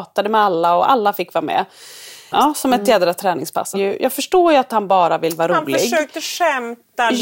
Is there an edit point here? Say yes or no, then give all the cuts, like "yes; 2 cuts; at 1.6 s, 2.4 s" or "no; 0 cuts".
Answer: yes; 2 cuts; at 2.3 s, 3.7 s